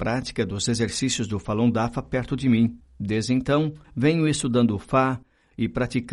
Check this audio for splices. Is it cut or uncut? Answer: uncut